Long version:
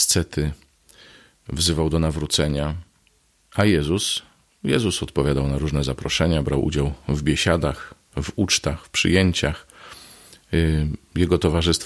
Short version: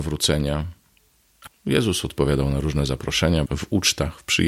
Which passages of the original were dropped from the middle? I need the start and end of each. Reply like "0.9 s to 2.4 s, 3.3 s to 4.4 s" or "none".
3.6 s to 4.4 s, 6.4 s to 8.1 s

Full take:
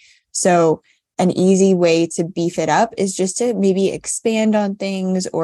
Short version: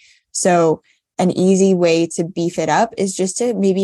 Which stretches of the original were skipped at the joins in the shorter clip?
none

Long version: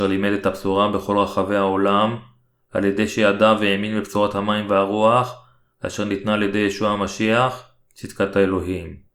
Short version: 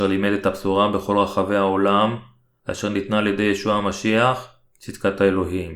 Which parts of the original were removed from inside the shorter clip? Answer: 2.6 s to 5.7 s

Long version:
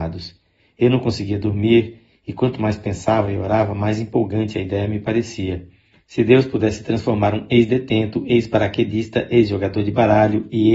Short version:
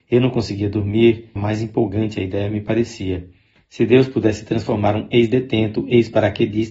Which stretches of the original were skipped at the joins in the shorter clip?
2.1 s to 3.7 s

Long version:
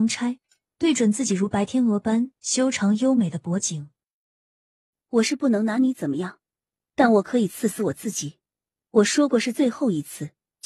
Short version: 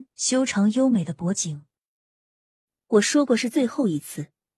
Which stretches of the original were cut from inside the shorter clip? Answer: 5.0 s to 8.8 s

